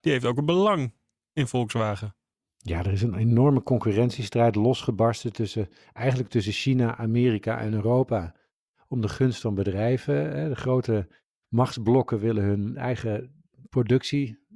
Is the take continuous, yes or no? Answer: yes